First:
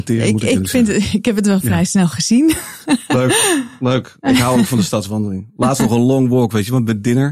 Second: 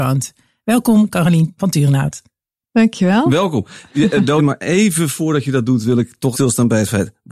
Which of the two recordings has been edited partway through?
second; 2 cuts; at 4.4 s, 6.3 s

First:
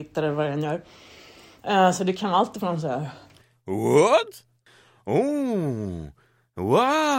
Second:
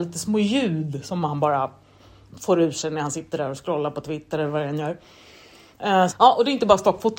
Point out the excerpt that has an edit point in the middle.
second; 1 cut; at 6.1 s

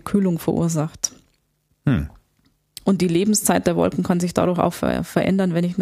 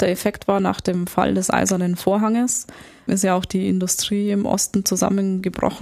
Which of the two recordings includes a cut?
second; 1 cut; at 3.1 s

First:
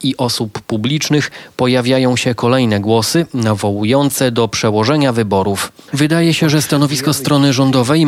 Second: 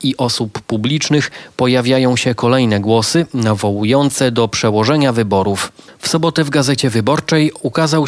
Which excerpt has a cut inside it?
first; 1 cut; at 5.9 s

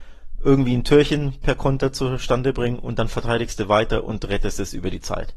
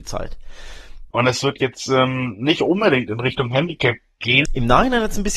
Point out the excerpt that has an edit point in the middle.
second; 2 cuts; at 1.1 s, 4.5 s

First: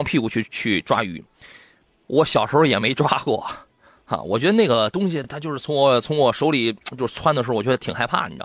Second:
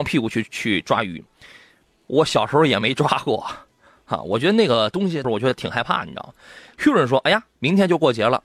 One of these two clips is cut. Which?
second; 1 cut; at 5.2 s

